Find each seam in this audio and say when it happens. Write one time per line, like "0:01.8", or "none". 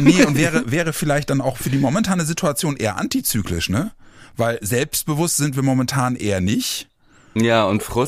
none

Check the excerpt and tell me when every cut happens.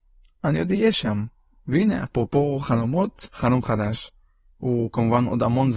0:01.6
0:03.3

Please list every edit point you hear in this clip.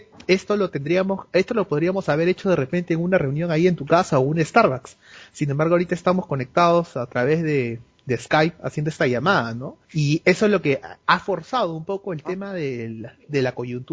0:09.8

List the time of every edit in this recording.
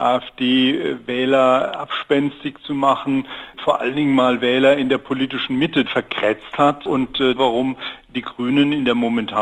0:05.9
0:07.4

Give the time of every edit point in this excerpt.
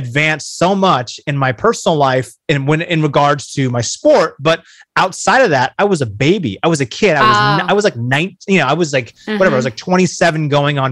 none

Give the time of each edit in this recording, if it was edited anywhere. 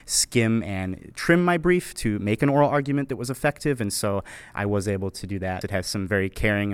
0:05.6

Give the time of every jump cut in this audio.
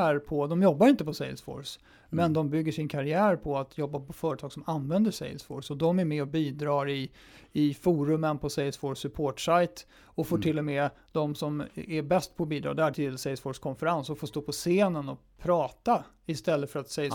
0:12.9

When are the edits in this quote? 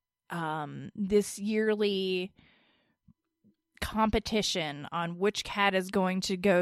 none

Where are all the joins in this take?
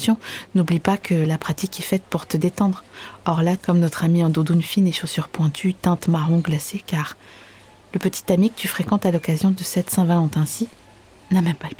0:03.6

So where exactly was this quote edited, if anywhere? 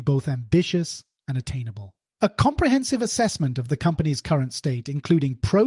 0:02.2

